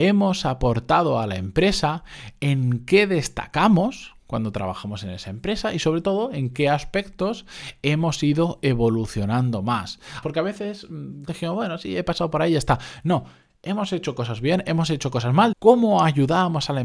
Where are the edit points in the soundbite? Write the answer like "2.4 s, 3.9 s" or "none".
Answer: 10.2 s, 11.3 s, 15.5 s